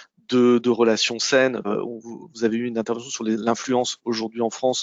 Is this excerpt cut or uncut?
cut